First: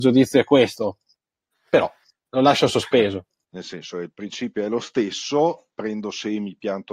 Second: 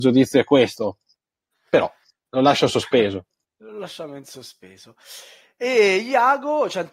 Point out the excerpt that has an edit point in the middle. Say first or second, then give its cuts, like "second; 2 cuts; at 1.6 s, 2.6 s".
first; 2 cuts; at 3.5 s, 5.7 s